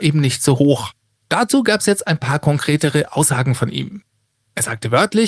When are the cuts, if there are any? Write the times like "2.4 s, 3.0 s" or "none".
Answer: 1.2 s